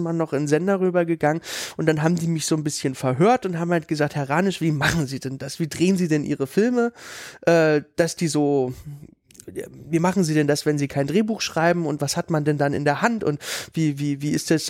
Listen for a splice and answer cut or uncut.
uncut